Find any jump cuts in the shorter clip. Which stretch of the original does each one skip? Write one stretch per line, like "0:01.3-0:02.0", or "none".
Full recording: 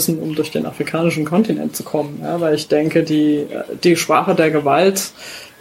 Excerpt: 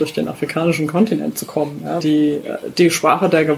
0:02.4-0:03.1